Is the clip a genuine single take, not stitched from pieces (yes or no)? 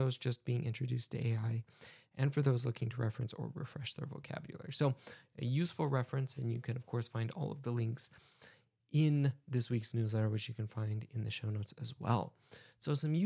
yes